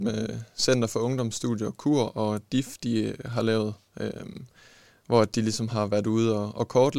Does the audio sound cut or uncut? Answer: uncut